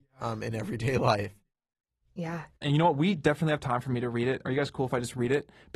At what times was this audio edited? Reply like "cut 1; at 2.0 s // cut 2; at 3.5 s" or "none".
cut 1; at 2.6 s

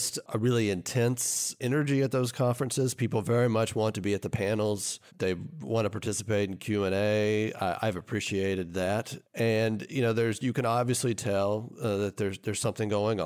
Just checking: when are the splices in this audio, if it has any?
cut 1; at 5.1 s

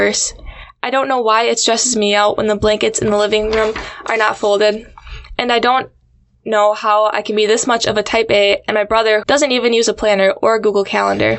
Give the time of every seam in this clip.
cut 1; at 9.2 s

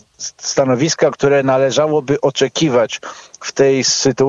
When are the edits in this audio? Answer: none

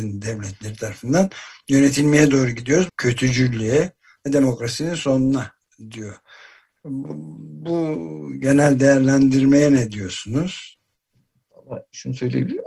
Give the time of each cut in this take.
cut 1; at 2.9 s

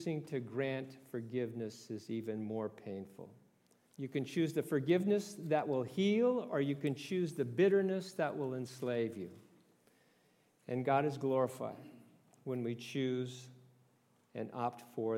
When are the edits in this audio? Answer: cut 1; at 3.8 s

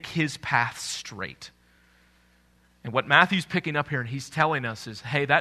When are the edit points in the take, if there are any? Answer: none

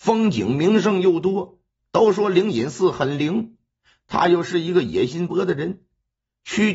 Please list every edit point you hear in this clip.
cut 1; at 1.8 s // cut 2; at 5.3 s

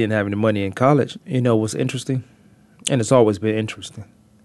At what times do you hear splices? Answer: cut 1; at 1.2 s

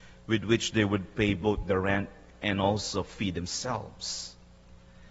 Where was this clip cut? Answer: none

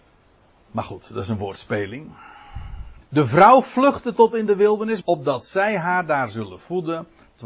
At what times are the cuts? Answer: cut 1; at 3.0 s // cut 2; at 5.0 s

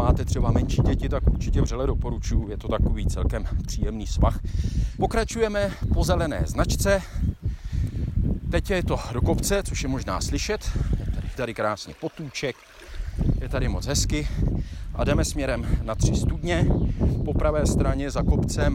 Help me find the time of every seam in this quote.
cut 1; at 5.0 s // cut 2; at 11.4 s

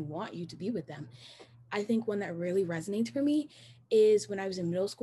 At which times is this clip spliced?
cut 1; at 1.7 s

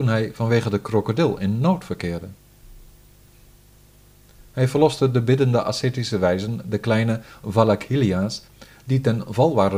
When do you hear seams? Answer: none

